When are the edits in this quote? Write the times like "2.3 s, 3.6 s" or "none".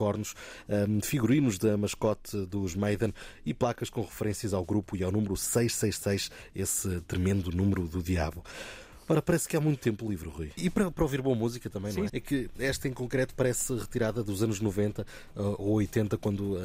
10.6 s, 12.1 s